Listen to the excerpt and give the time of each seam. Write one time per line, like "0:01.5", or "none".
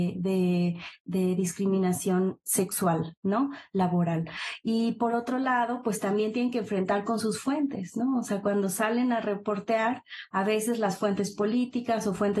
none